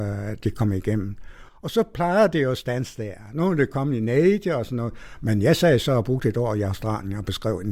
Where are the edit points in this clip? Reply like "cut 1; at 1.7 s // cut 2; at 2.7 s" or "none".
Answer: none